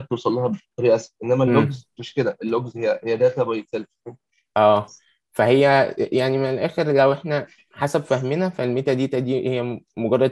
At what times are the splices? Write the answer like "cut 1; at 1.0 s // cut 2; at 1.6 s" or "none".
cut 1; at 2.0 s